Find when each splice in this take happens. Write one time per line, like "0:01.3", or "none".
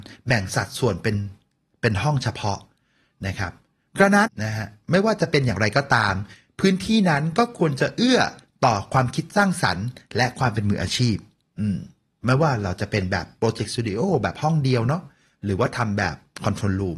0:04.3